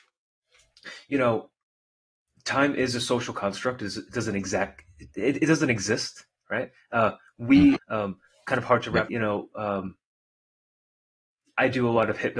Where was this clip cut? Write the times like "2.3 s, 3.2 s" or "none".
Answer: 7.7 s, 9.1 s